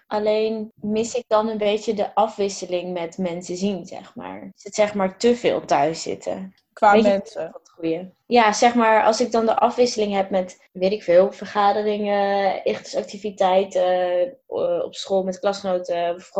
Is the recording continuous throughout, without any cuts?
yes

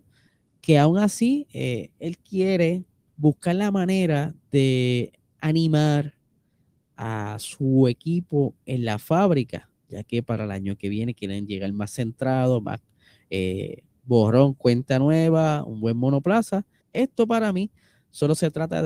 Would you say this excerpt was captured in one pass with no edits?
no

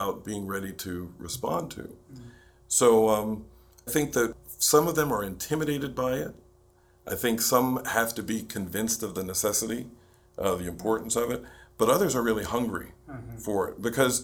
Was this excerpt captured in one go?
no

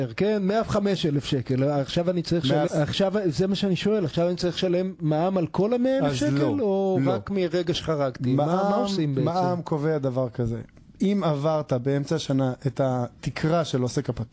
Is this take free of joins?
no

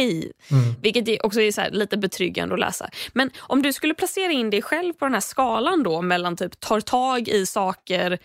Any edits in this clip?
no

